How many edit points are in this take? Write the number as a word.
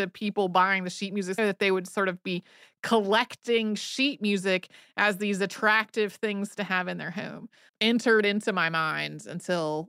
two